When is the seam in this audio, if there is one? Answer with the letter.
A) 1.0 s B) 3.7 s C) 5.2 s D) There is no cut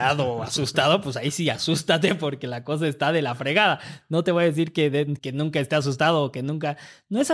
C